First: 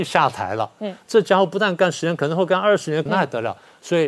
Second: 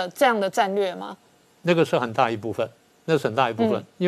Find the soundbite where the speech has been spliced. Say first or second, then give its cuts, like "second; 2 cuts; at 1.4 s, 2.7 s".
first; 1 cut; at 3.1 s